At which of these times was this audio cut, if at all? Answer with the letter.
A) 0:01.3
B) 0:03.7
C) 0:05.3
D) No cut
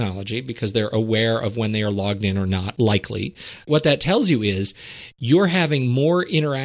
B